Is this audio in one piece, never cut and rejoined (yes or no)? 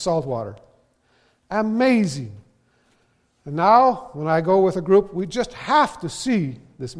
yes